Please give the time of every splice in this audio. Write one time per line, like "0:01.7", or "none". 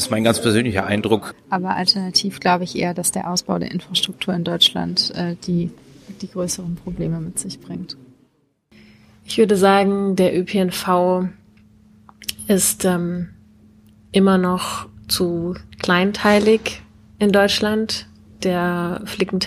0:01.3